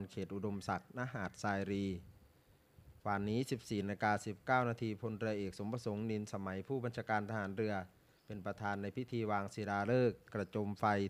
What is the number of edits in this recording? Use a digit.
1